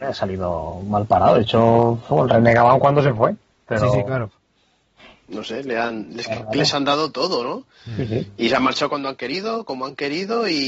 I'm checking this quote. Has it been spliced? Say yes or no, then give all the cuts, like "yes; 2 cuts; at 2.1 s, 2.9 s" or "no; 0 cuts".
no; 0 cuts